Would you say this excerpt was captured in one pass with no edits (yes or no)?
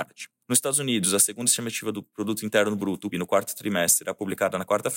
no